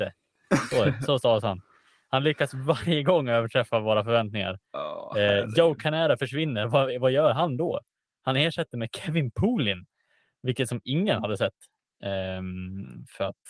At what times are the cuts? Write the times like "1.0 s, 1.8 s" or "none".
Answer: 11.9 s